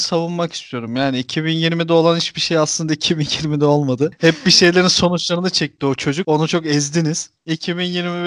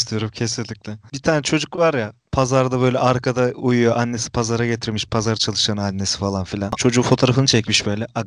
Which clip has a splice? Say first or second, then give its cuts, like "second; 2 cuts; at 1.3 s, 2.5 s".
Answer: second; 1 cut; at 6.8 s